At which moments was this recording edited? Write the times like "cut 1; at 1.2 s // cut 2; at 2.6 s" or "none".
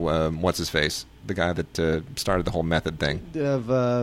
none